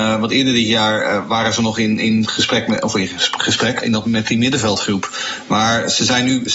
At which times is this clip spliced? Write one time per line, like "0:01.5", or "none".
0:03.8